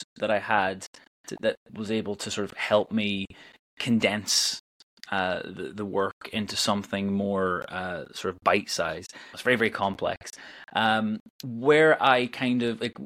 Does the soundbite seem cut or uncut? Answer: cut